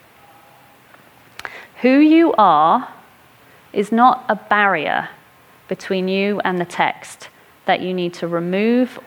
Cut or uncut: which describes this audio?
cut